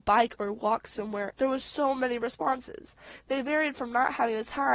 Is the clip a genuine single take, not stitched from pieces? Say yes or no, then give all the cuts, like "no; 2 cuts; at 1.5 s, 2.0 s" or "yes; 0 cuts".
no; 1 cut; at 1.3 s